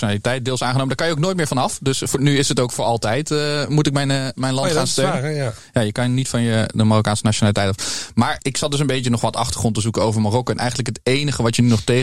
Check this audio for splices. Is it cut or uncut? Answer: cut